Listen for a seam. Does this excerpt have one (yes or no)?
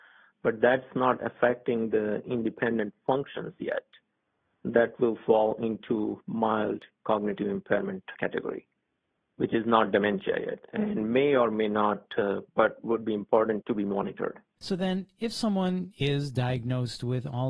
yes